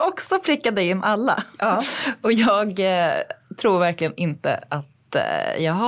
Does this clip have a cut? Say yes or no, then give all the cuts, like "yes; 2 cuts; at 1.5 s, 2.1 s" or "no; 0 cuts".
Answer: no; 0 cuts